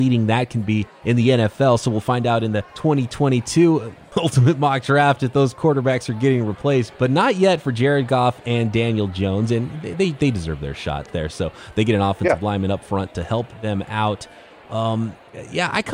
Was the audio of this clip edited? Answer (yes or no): no